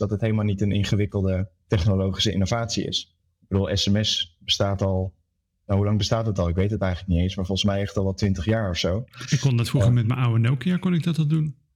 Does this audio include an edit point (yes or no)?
no